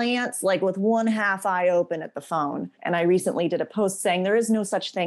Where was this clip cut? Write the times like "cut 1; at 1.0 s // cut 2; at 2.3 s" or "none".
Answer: cut 1; at 2.8 s